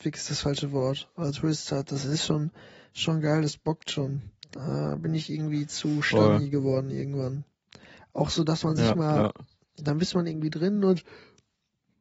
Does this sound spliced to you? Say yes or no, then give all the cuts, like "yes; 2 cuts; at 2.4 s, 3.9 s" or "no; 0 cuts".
no; 0 cuts